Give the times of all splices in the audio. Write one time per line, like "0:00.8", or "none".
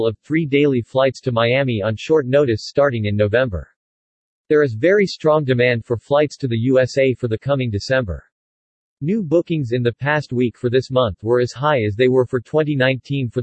none